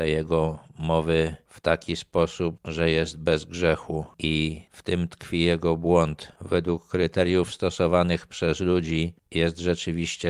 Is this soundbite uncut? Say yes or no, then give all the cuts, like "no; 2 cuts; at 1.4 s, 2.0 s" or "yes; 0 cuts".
no; 1 cut; at 2.6 s